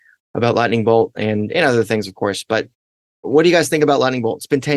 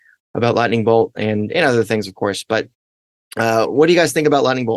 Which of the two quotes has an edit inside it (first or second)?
first